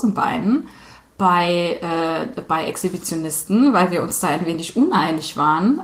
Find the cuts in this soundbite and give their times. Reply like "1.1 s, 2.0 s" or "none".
none